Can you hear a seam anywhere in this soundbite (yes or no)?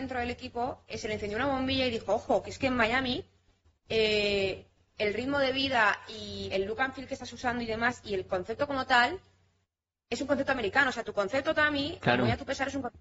no